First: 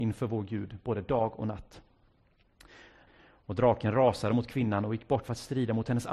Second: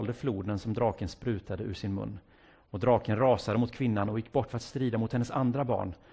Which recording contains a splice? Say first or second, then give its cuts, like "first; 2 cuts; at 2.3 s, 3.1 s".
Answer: first; 1 cut; at 3.1 s